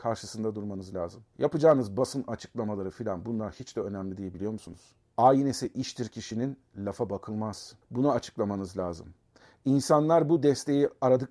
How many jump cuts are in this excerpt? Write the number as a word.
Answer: one